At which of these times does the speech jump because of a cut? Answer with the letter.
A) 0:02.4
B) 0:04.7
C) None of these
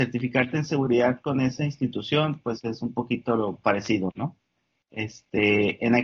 C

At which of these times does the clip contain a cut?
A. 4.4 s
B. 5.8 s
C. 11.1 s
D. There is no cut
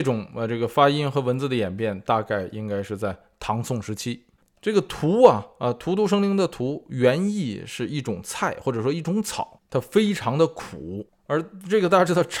A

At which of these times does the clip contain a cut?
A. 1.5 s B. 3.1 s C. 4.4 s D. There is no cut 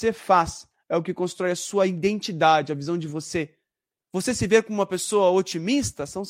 D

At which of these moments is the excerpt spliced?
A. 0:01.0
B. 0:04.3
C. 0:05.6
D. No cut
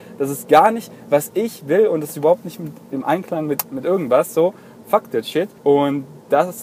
C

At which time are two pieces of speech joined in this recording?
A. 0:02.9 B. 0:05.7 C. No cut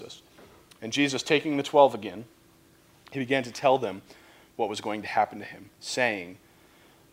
B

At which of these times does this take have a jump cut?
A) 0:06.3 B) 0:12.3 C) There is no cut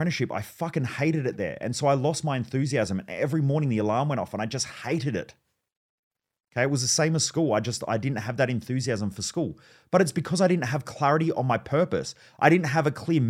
C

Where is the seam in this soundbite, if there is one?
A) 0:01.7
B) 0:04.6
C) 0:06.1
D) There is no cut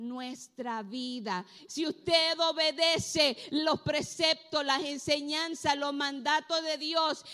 A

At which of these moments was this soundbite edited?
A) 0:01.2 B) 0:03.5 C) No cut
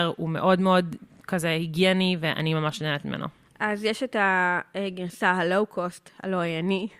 C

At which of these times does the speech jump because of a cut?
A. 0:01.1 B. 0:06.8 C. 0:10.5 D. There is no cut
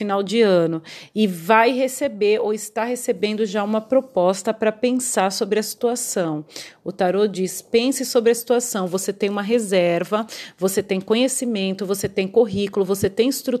D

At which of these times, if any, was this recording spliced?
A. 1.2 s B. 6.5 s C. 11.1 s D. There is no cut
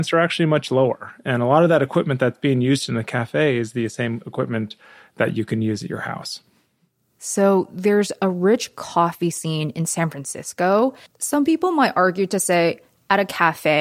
C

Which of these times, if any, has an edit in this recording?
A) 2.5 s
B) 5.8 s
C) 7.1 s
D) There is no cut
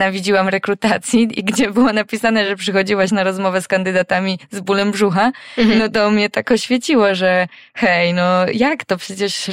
D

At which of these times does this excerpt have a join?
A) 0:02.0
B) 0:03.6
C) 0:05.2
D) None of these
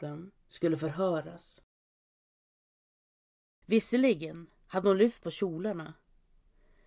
B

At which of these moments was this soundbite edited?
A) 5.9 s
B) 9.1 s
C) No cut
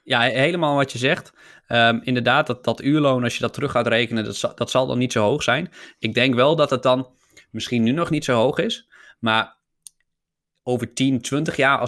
C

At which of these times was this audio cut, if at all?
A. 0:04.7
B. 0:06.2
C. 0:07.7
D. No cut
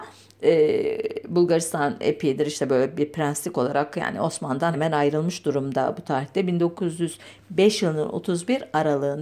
A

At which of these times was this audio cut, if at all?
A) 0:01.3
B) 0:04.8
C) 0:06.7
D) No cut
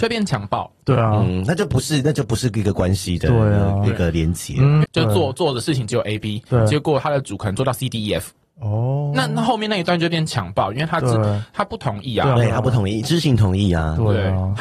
B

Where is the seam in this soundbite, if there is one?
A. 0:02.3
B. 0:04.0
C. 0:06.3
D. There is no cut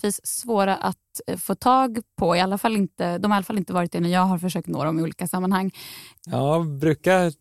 C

